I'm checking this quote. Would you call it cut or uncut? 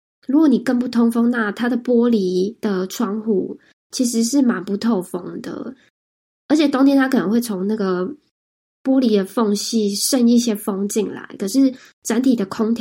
uncut